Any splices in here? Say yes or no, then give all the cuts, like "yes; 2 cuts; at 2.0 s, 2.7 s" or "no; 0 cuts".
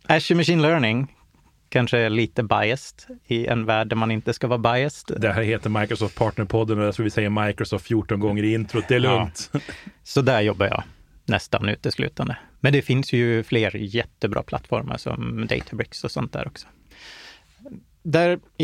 no; 0 cuts